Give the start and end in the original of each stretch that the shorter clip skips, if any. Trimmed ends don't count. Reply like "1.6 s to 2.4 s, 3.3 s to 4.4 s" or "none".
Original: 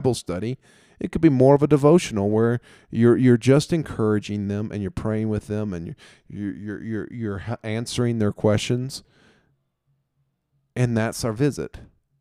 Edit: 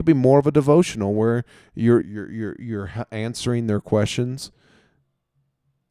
3.2 s to 6.5 s